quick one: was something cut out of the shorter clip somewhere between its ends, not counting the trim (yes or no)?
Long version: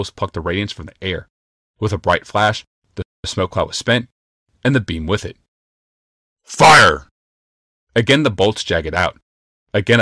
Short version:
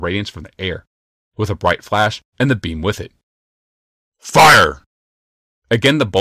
yes